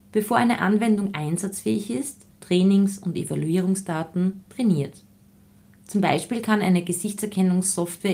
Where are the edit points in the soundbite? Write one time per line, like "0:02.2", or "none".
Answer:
0:02.3